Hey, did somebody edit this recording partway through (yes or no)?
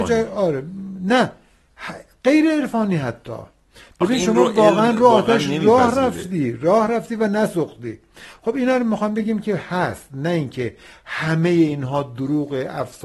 no